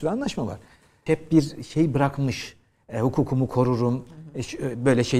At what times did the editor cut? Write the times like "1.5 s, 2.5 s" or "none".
1.1 s